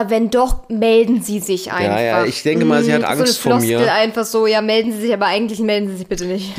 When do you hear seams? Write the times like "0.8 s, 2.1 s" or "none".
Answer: 3.0 s